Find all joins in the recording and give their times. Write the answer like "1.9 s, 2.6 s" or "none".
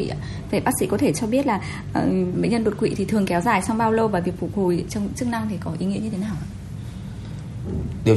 2.3 s